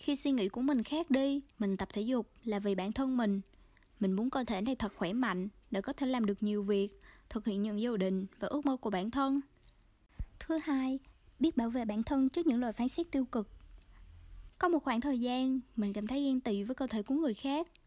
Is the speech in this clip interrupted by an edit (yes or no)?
yes